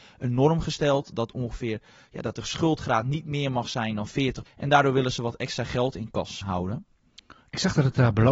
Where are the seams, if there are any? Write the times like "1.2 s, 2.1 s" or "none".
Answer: 4.5 s, 6.4 s